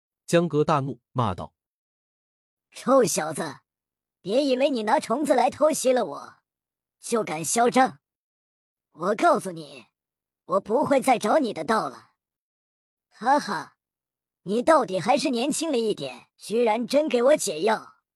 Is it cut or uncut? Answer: cut